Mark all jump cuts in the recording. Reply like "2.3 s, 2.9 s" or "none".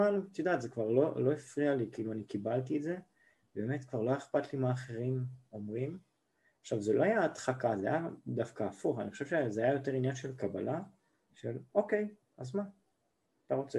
12.2 s